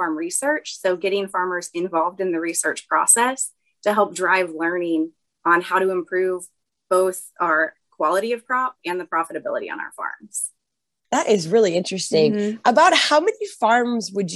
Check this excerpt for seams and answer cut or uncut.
uncut